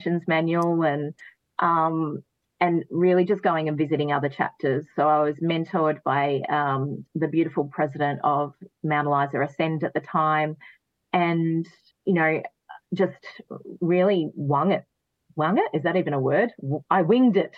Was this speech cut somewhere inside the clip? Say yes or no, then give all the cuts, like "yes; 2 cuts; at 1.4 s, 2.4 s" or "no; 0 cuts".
no; 0 cuts